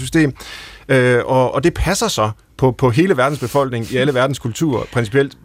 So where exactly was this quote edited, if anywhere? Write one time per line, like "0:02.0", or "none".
0:01.5